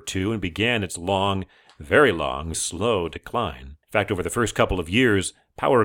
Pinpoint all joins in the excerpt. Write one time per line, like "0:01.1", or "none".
0:02.5
0:03.8